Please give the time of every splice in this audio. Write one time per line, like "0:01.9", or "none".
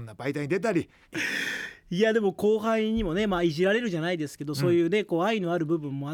0:01.0